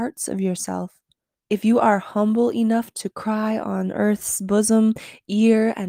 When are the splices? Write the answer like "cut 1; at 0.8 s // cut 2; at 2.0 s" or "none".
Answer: cut 1; at 1.4 s // cut 2; at 3.1 s